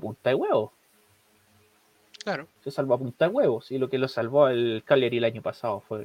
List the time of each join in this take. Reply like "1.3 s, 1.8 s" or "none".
2.6 s